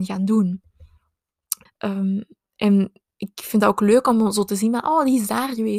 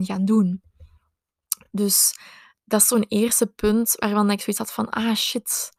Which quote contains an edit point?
first; 1 cut; at 1.7 s

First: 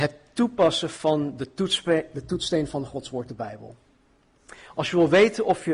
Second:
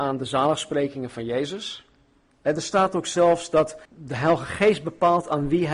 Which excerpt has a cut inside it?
second; 2 cuts; at 2.3 s, 3.8 s

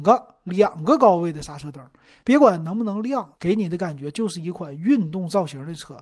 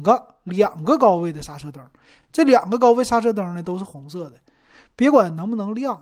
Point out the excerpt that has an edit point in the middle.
first; 2 cuts; at 2.2 s, 3.4 s

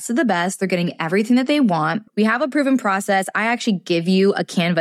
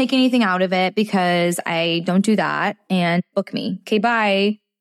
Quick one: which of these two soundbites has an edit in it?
first; 1 cut; at 2.1 s

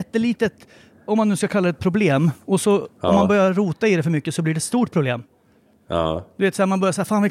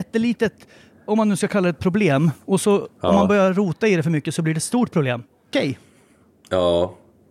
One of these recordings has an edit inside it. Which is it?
second; 1 cut; at 5.5 s

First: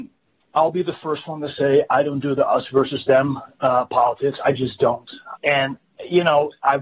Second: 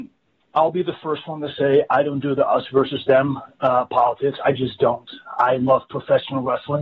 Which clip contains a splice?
first; 1 cut; at 5.3 s

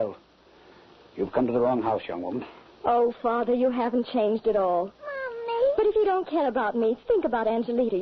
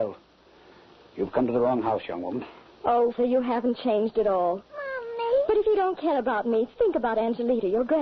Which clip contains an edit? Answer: second; 1 cut; at 3.2 s

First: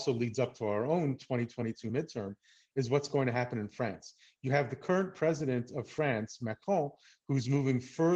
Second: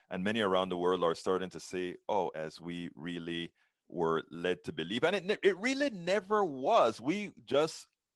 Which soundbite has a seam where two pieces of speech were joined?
second; 1 cut; at 2.3 s

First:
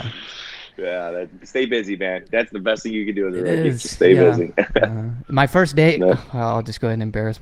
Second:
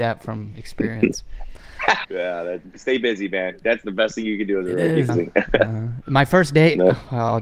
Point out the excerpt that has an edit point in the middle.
second; 2 cuts; at 2.0 s, 5.1 s

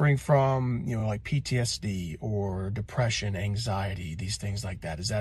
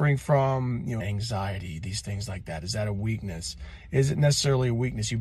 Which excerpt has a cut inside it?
second; 1 cut; at 1.0 s

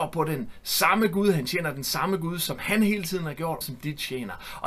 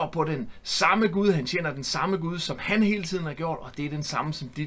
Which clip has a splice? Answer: first; 1 cut; at 3.6 s

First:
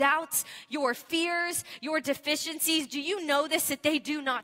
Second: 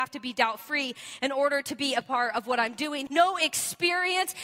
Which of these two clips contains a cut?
second; 1 cut; at 3.1 s

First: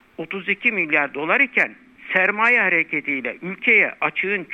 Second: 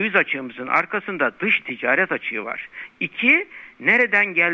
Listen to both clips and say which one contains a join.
second; 1 cut; at 2.9 s

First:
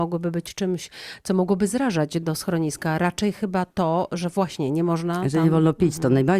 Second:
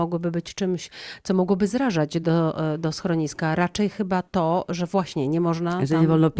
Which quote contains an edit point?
first; 1 cut; at 2.2 s

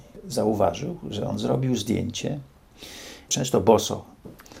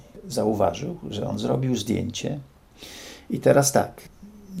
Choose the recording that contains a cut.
first; 1 cut; at 3.3 s

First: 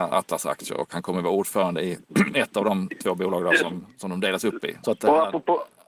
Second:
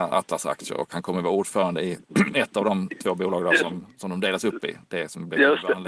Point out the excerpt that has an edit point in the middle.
first; 1 cut; at 4.8 s

